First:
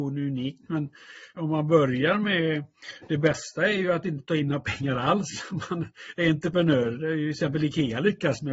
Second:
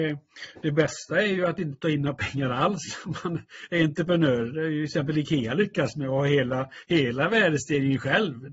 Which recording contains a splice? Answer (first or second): first